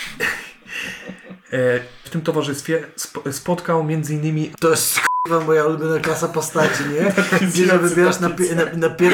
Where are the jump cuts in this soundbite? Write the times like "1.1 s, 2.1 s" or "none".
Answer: 2.0 s, 4.5 s

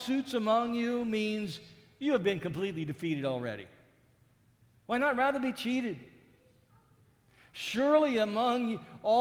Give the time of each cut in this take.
4.7 s

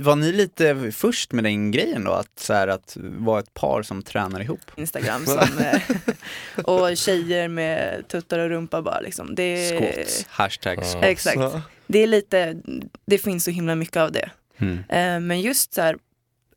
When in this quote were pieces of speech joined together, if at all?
4.8 s

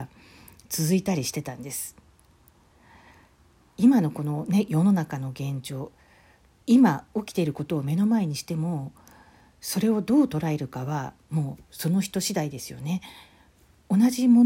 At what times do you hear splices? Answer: none

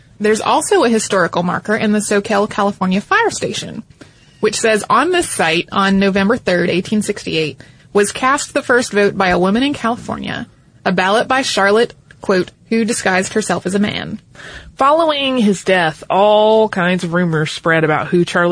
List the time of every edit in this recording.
12.5 s

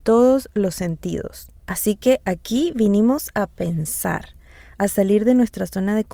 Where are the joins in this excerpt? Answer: none

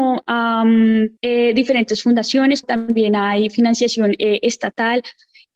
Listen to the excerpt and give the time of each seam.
1.2 s, 2.6 s

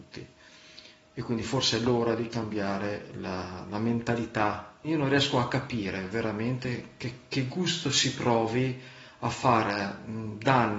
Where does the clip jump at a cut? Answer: 4.8 s

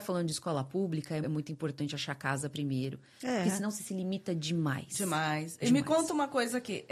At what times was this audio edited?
1.2 s

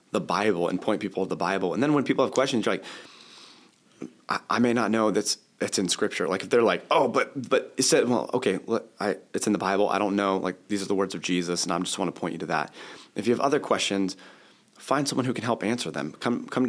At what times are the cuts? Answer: none

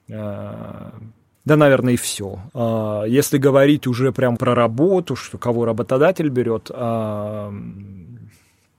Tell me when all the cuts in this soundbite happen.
1.3 s, 2.5 s, 4.4 s

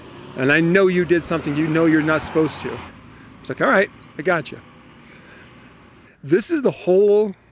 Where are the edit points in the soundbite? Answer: 2.9 s, 4.1 s, 6.0 s

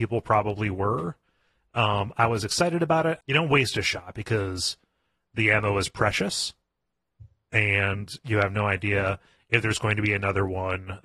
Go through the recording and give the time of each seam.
3.2 s

